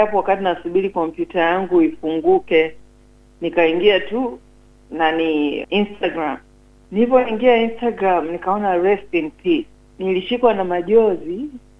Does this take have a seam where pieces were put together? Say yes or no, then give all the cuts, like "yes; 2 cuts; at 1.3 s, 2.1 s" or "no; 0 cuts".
yes; 2 cuts; at 5.6 s, 9.9 s